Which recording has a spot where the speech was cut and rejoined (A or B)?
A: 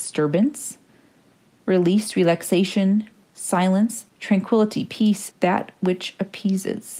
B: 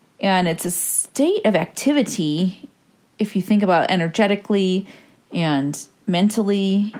A